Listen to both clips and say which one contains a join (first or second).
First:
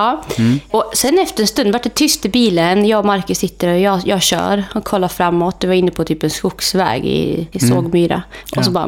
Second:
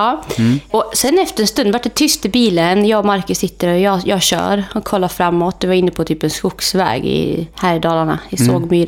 first